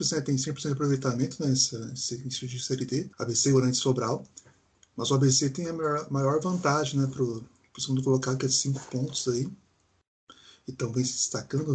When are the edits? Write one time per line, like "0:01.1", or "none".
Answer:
0:03.1